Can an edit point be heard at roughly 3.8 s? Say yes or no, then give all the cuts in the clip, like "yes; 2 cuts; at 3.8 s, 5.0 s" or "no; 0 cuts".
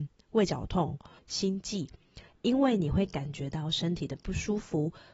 no; 2 cuts; at 1.2 s, 2.3 s